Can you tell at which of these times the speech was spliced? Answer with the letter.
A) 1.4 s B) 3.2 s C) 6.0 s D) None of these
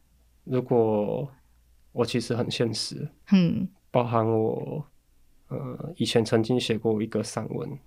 D